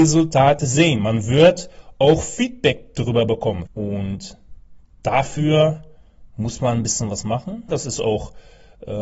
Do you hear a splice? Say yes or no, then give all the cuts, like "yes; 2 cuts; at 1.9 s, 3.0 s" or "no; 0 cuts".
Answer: yes; 2 cuts; at 3.7 s, 7.7 s